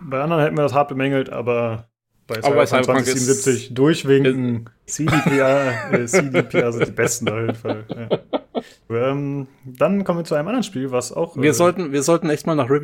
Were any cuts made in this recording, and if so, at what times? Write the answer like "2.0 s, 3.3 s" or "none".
4.9 s, 8.9 s